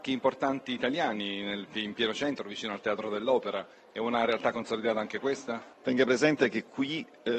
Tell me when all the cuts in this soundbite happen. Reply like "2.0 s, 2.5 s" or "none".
none